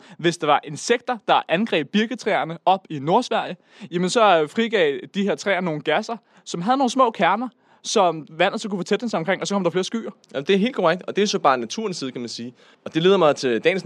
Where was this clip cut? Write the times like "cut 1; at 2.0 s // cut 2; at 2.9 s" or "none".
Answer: none